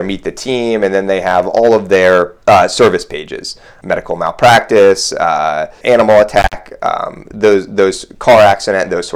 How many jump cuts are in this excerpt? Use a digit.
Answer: 3